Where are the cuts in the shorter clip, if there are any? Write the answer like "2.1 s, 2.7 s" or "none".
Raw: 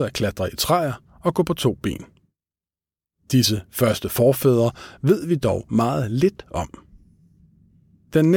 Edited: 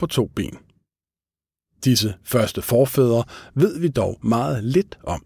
none